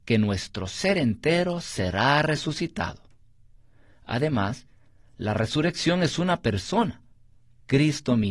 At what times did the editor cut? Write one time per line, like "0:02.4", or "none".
none